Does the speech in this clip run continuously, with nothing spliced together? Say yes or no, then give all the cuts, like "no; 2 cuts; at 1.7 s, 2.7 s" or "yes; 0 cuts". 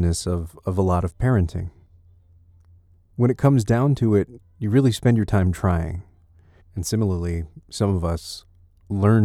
no; 2 cuts; at 4.4 s, 6.6 s